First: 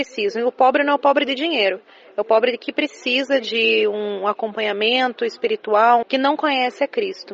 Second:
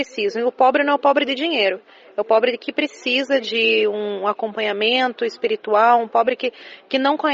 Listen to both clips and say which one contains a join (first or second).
first